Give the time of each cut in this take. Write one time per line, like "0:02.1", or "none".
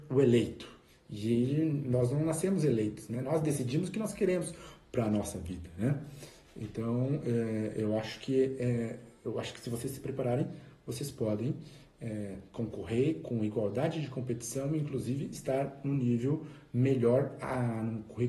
none